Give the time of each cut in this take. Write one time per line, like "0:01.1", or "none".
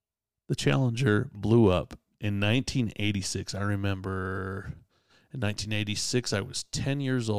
none